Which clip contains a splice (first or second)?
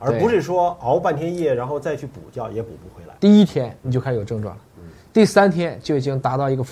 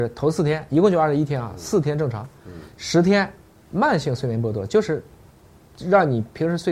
first